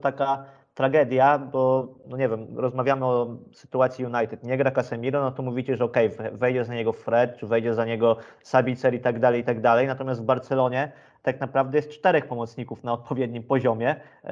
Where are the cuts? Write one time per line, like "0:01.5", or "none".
none